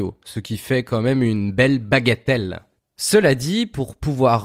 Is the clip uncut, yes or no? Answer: yes